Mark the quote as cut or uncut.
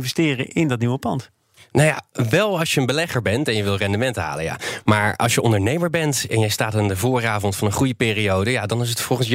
uncut